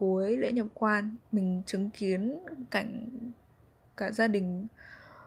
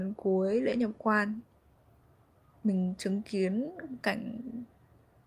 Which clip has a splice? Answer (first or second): first